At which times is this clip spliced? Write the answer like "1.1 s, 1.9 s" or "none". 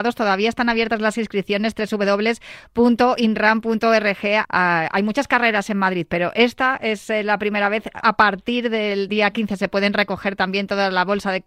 4.5 s, 8.0 s, 9.1 s